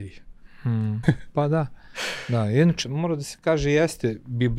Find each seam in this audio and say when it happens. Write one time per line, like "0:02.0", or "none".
0:01.0
0:02.8